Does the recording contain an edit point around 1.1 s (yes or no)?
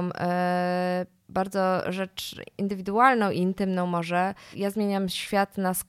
no